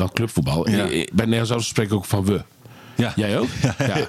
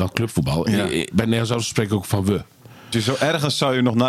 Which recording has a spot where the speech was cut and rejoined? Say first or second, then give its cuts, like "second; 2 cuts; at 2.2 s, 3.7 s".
second; 1 cut; at 2.9 s